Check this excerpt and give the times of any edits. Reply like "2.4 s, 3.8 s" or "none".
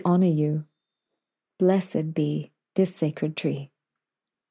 1.5 s